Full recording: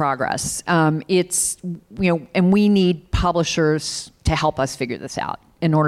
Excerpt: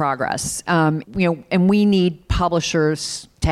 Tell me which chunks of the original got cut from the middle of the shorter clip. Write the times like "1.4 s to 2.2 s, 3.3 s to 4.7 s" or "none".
1.0 s to 1.9 s